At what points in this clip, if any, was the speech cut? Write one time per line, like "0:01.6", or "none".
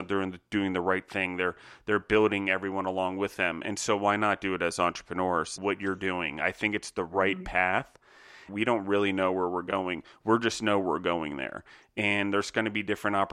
0:05.6
0:08.5